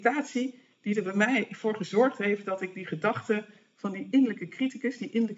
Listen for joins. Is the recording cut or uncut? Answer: uncut